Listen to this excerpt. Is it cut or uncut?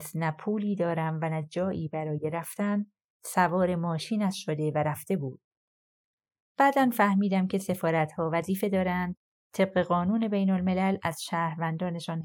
uncut